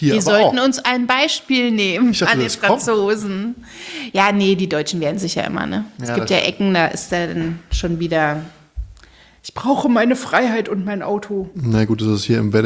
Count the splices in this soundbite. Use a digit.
0